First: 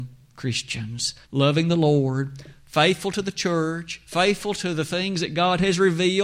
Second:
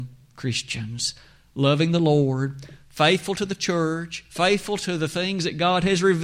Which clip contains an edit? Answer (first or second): first